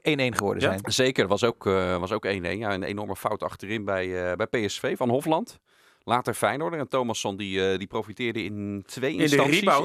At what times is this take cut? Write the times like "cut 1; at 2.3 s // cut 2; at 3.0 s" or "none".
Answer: none